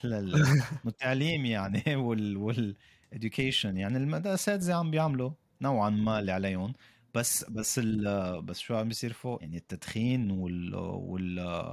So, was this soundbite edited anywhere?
yes; 1 cut; at 9.4 s

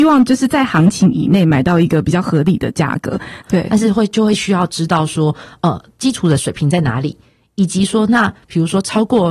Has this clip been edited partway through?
yes; 1 cut; at 3.4 s

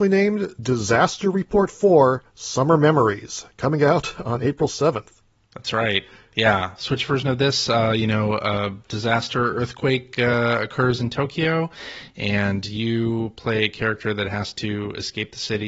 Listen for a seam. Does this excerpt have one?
no; 0 cuts

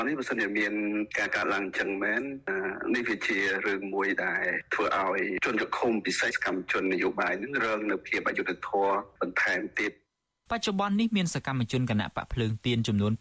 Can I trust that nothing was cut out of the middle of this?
no; 1 cut; at 6.3 s

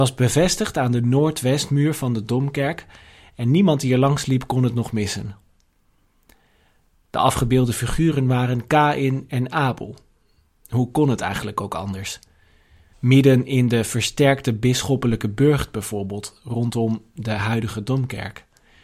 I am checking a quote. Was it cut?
yes; 1 cut; at 12.9 s

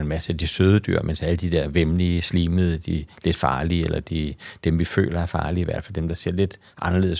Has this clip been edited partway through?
no; 0 cuts

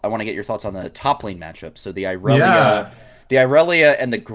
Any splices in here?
no; 0 cuts

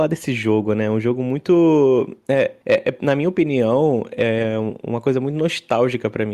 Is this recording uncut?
yes; 0 cuts

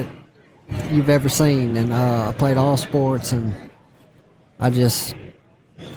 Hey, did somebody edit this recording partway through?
no; 0 cuts

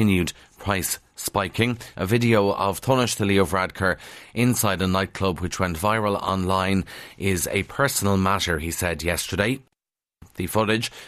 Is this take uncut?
no; 1 cut; at 1.9 s

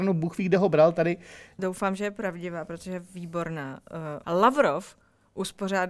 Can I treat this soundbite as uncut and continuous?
no; 2 cuts; at 1.6 s, 4.2 s

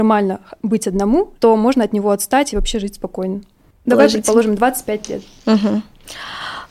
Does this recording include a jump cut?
yes; 2 cuts; at 1.3 s, 3.9 s

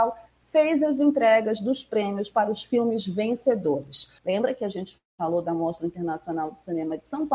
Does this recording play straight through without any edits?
no; 1 cut; at 4.2 s

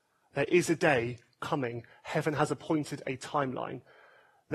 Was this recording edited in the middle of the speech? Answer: no; 0 cuts

